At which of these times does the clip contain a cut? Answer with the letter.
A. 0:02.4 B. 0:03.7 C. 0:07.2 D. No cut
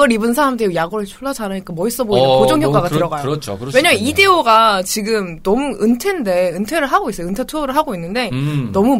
D